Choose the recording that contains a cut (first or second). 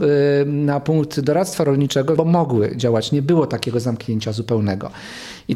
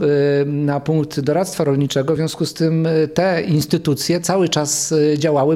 first